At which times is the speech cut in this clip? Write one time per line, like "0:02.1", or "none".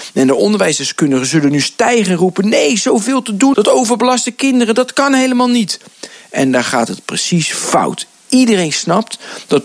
0:03.5